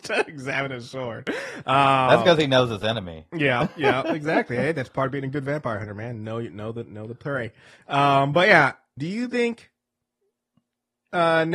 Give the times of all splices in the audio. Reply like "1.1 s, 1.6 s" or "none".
9.0 s